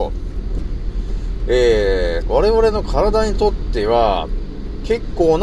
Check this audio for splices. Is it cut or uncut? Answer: cut